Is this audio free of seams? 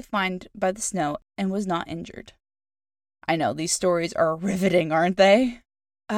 yes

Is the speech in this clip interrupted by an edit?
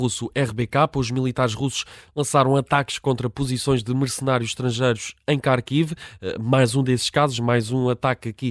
no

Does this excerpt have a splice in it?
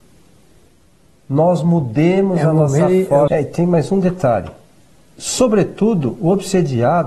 yes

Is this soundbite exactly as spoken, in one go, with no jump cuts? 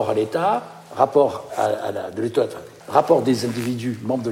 no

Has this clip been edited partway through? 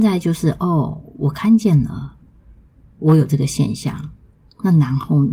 no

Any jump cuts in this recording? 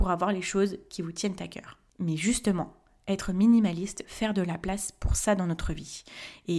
yes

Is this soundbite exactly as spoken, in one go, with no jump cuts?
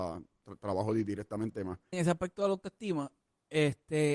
no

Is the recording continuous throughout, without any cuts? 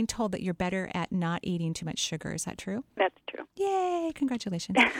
yes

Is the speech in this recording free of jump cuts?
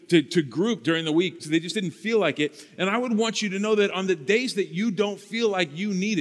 no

